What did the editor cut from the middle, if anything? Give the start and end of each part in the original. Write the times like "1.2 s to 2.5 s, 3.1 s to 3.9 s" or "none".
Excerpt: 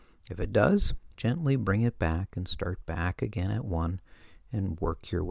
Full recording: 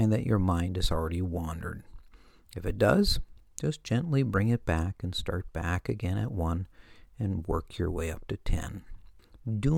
3.4 s to 3.8 s

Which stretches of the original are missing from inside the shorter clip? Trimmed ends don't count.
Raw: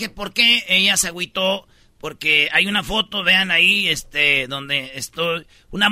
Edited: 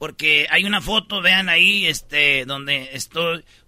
none

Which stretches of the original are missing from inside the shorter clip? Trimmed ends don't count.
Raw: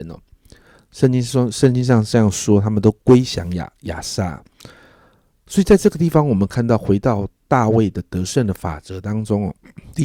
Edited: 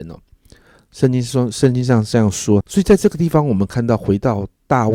2.6 s to 5.4 s

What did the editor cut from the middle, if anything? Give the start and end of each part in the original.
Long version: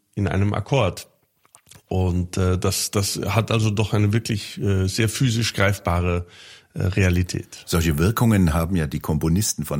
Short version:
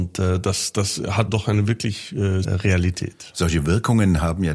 3.5 s to 3.7 s, 4.9 s to 6.8 s

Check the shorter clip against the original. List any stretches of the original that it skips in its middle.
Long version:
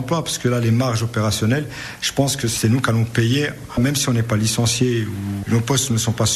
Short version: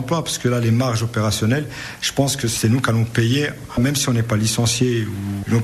none

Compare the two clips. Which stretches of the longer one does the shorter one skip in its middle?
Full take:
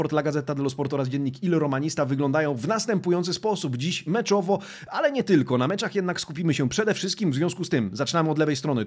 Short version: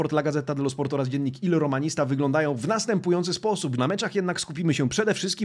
3.8 s to 5.6 s

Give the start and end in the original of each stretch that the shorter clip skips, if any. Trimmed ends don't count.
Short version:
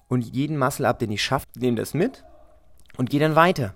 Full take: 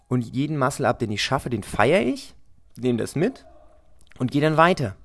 1.4 s to 2.6 s

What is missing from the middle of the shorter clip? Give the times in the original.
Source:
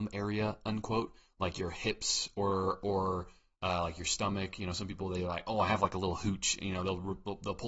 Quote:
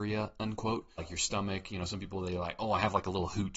1.2 s to 3.9 s

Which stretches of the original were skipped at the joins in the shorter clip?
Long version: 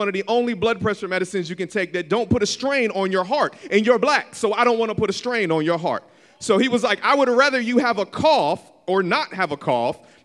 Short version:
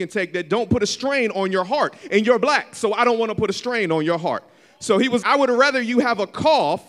6.8 s to 7.0 s

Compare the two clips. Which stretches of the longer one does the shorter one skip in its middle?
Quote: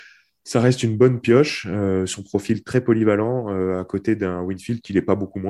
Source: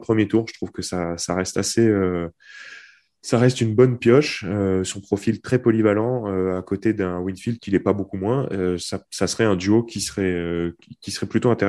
none

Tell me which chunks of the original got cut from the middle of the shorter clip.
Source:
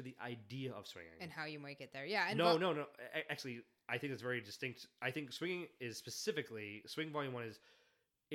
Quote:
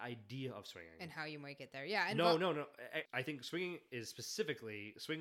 3.3 s to 4.9 s

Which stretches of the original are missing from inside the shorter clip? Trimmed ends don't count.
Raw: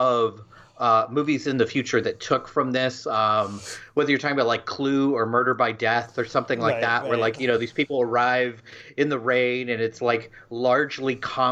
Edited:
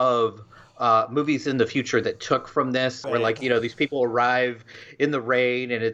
3.0 s to 7.0 s

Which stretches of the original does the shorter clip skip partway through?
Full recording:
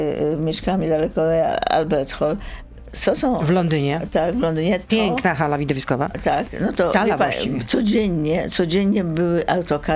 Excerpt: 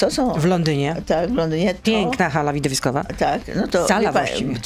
none

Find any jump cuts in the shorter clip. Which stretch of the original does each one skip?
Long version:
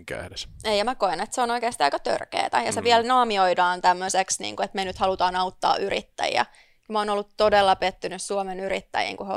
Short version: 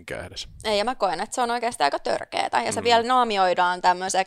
none

